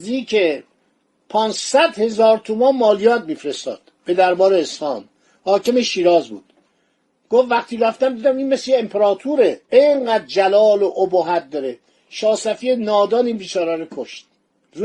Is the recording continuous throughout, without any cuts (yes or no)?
no